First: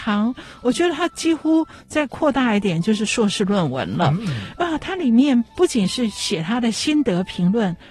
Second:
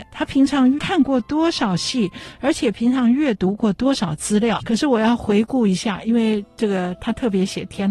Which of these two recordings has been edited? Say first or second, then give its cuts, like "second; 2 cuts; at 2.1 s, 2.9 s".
second; 1 cut; at 4.6 s